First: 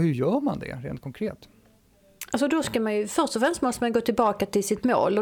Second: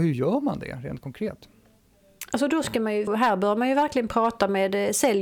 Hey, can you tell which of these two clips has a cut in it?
second; 1 cut; at 3.1 s

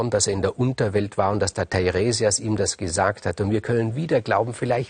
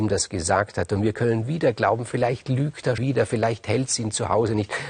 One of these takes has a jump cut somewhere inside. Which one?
second; 1 cut; at 3.0 s

